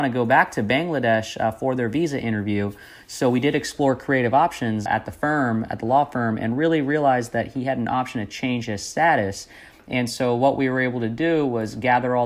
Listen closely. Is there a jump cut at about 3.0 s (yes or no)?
no